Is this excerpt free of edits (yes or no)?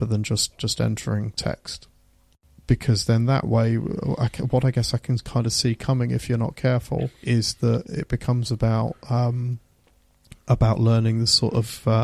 no